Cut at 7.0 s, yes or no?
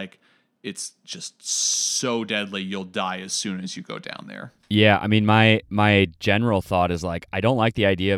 no